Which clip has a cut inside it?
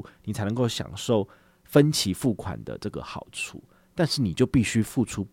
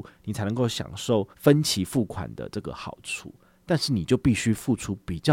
second; 1 cut; at 1.3 s

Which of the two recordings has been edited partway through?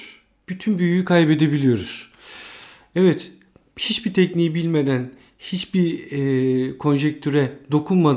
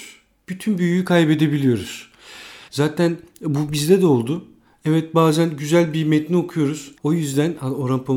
second; 2 cuts; at 2.7 s, 7.0 s

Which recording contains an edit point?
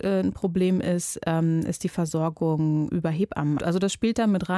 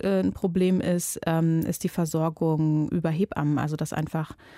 first; 1 cut; at 3.6 s

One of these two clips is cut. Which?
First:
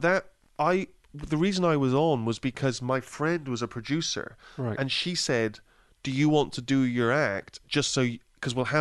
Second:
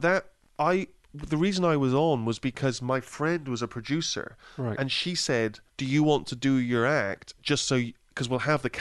second; 1 cut; at 5.7 s

